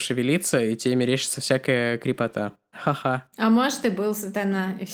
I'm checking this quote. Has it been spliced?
yes; 1 cut; at 2.7 s

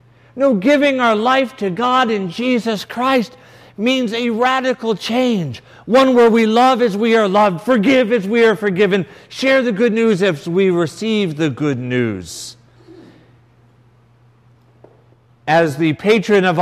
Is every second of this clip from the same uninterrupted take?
yes; 0 cuts

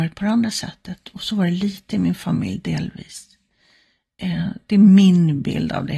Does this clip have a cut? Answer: no; 0 cuts

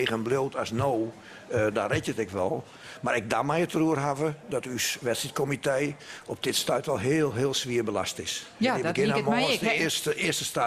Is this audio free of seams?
yes; 0 cuts

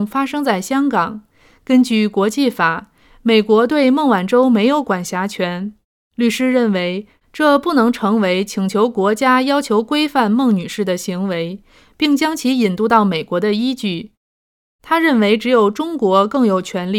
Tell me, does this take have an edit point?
no; 0 cuts

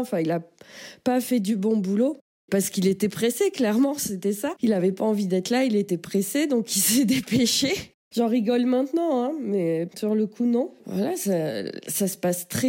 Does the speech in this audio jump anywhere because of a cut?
yes; 1 cut; at 10.8 s

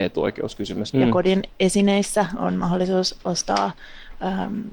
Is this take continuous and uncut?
no; 1 cut; at 0.9 s

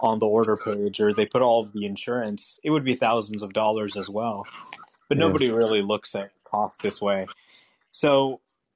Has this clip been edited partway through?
no; 0 cuts

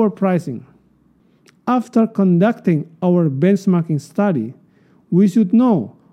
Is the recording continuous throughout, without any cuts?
yes; 0 cuts

